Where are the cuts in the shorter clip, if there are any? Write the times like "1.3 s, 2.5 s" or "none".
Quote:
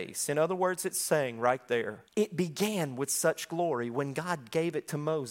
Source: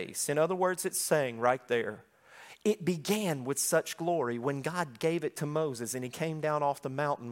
2.1 s